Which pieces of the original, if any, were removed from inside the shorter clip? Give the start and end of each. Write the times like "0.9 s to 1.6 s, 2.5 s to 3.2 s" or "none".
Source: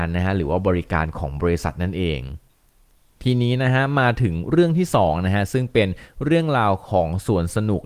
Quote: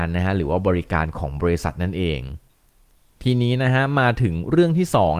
none